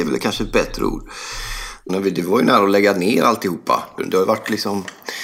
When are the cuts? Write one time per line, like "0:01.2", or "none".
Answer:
0:01.9
0:04.0